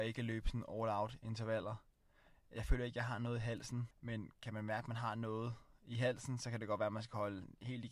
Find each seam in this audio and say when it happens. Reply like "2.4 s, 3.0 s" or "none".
3.9 s